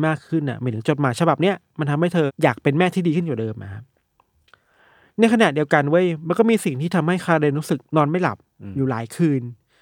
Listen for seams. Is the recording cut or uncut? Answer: cut